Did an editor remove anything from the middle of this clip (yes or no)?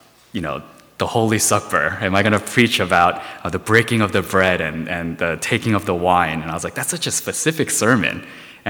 no